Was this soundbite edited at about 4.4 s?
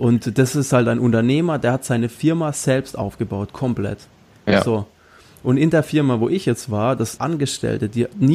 no; 1 cut; at 7.2 s

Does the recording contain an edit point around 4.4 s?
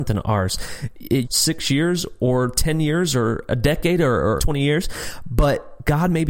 yes; 2 cuts; at 1.2 s, 4.4 s

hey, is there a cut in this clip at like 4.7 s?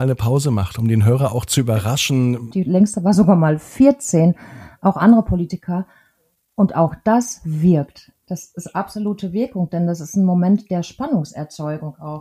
no; 1 cut; at 2.5 s

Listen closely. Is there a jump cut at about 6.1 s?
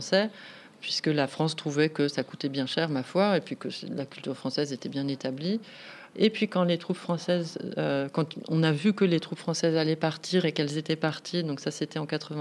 yes; 1 cut; at 6.1 s

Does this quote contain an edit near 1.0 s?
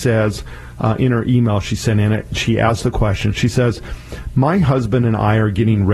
no; 0 cuts

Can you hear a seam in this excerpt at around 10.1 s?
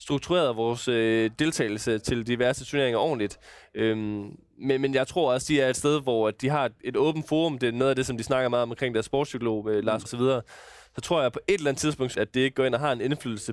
yes; 2 cuts; at 10.1 s, 12.1 s

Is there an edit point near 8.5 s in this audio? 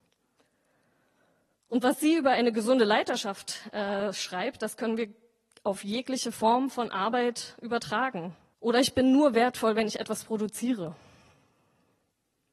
yes; 1 cut; at 8.5 s

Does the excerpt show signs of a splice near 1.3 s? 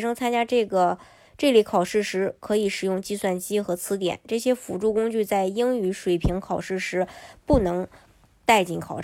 no; 0 cuts

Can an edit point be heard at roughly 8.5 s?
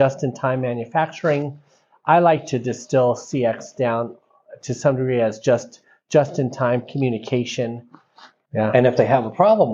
yes; 1 cut; at 8.5 s

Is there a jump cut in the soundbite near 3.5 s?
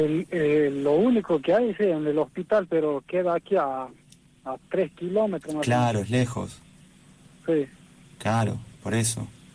no; 0 cuts

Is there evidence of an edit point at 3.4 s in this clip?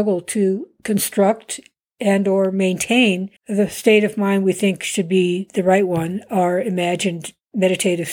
yes; 1 cut; at 3.4 s

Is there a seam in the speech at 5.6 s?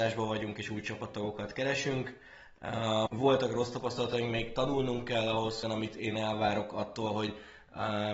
yes; 2 cuts; at 3.1 s, 5.6 s

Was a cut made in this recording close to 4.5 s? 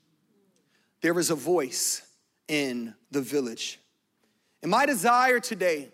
no; 1 cut; at 3.0 s

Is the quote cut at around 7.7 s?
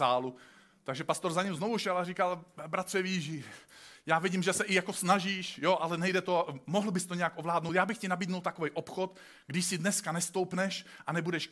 no; 0 cuts

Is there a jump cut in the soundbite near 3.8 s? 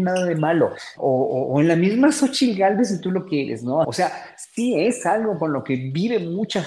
yes; 2 cuts; at 1.0 s, 3.8 s

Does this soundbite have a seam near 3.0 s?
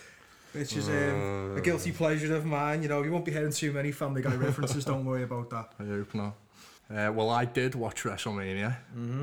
no; 1 cut; at 6.8 s

